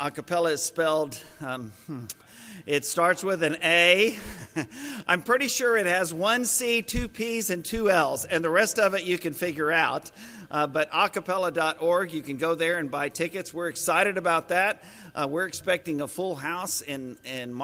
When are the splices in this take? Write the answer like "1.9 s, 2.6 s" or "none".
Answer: none